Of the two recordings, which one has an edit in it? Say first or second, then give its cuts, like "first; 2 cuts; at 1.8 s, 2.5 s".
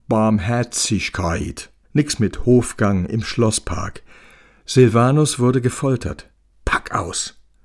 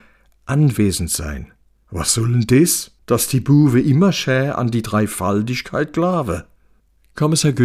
first; 1 cut; at 1.8 s